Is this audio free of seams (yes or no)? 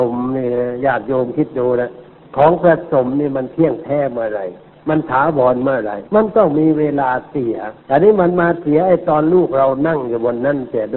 no